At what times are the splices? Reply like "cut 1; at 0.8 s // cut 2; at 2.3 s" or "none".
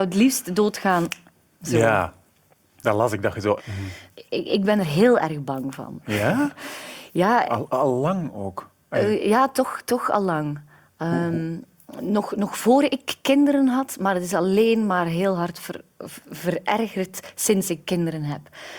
cut 1; at 3.6 s